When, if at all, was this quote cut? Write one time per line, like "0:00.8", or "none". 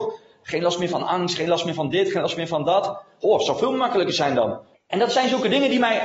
0:04.7